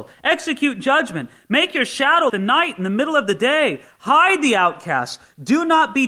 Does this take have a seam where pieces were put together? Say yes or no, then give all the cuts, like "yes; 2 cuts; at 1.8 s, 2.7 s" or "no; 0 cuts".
yes; 1 cut; at 2.3 s